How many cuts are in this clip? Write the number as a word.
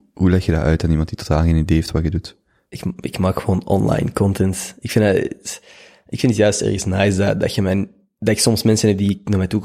zero